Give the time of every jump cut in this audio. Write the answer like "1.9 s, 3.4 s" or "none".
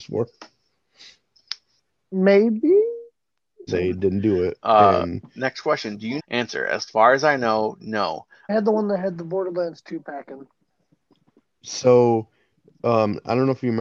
3.7 s, 6.2 s, 8.5 s